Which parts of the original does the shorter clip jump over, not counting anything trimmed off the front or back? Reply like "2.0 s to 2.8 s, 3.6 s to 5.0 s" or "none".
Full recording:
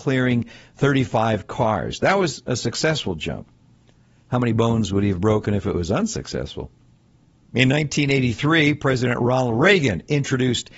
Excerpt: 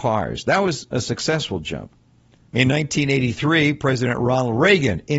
4.0 s to 7.5 s